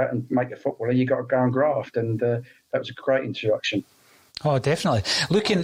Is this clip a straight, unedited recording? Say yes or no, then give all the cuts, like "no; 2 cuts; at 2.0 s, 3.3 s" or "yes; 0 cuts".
yes; 0 cuts